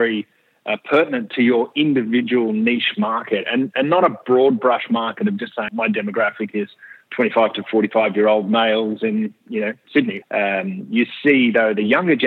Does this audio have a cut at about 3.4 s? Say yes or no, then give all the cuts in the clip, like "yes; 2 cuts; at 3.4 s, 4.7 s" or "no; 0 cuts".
no; 2 cuts; at 5.7 s, 10.2 s